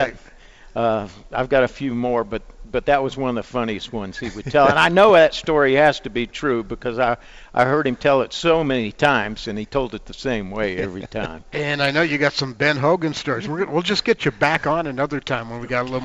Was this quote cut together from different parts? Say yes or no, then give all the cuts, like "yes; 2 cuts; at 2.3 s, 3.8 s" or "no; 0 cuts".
no; 0 cuts